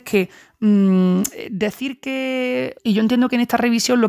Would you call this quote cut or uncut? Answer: cut